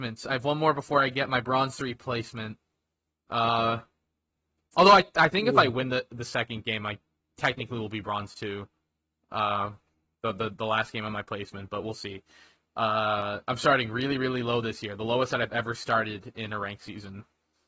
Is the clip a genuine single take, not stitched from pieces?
yes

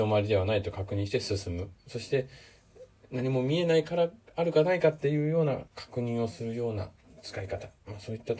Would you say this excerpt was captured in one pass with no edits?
no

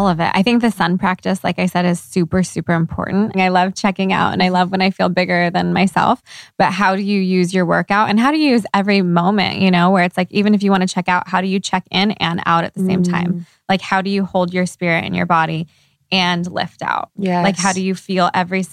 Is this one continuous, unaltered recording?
no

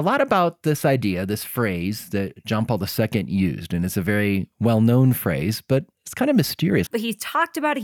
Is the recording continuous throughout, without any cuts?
no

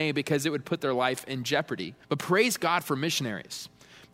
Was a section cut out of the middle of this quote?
yes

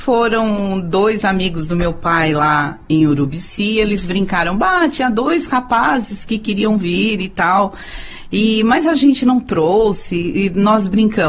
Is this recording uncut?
yes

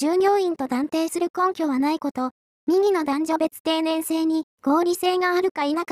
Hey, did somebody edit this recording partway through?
yes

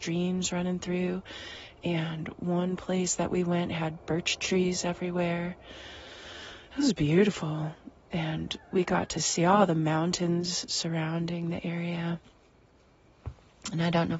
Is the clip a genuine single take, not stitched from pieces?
yes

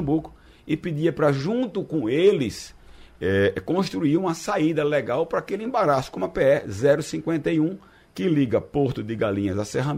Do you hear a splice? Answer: no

